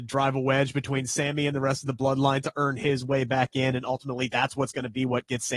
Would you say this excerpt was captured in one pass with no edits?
yes; 0 cuts

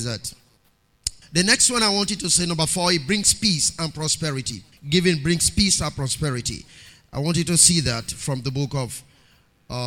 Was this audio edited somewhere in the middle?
yes; 2 cuts; at 1.2 s, 4.7 s

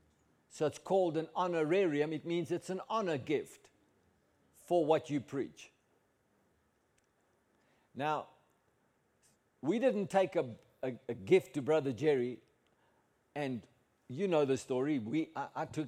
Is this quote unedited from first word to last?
yes; 0 cuts

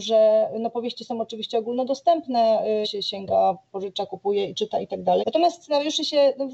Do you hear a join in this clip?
yes; 2 cuts; at 2.8 s, 5.2 s

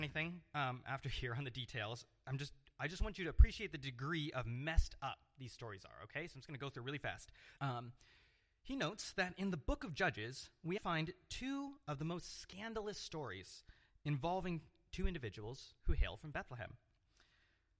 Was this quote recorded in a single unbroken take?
no; 2 cuts; at 7.6 s, 10.8 s

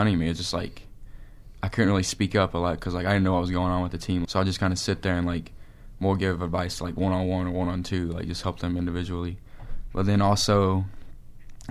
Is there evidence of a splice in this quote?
yes; 1 cut; at 4.2 s

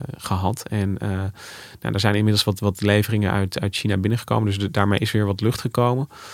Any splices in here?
no; 0 cuts

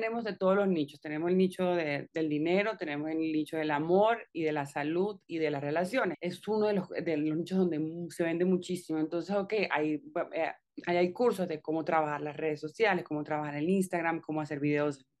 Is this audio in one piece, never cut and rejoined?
no; 1 cut; at 6.1 s

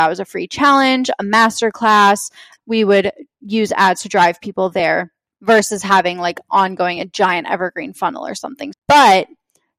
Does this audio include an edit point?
yes; 2 cuts; at 2.6 s, 8.7 s

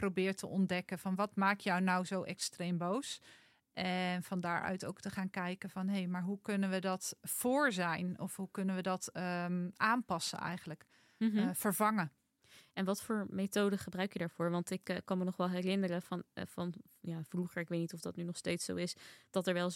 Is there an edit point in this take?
no; 0 cuts

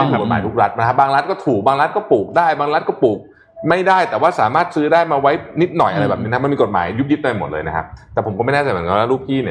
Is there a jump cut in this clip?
no; 0 cuts

